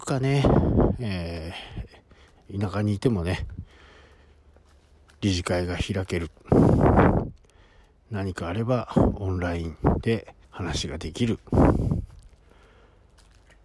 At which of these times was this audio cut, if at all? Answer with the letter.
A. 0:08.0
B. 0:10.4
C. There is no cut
B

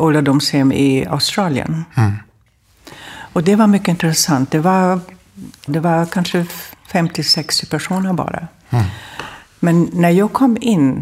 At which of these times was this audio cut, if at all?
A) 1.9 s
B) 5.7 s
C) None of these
B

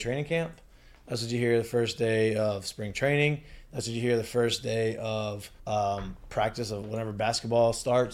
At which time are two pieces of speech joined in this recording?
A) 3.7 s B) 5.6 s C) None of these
B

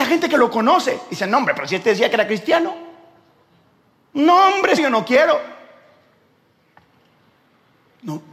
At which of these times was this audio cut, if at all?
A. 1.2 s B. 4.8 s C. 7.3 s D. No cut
B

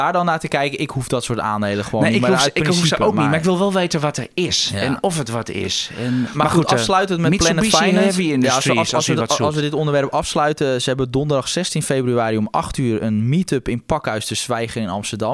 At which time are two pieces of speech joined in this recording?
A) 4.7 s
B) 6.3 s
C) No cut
B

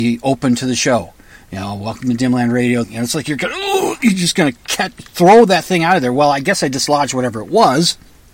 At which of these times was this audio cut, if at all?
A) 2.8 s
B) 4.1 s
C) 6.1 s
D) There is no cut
A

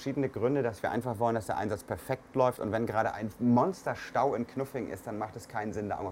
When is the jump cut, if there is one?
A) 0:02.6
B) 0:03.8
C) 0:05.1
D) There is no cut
D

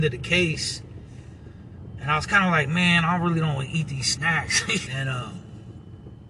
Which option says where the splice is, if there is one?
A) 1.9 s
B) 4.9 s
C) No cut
B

